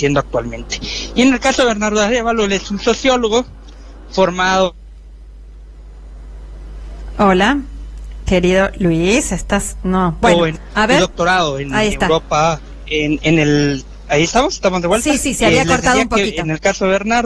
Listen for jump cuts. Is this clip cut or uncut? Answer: uncut